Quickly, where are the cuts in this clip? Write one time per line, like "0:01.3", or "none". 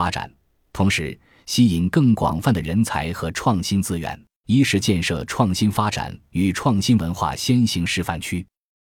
0:01.4
0:04.4